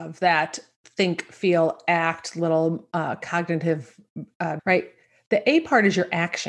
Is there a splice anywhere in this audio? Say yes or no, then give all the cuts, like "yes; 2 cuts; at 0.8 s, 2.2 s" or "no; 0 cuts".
yes; 1 cut; at 4.6 s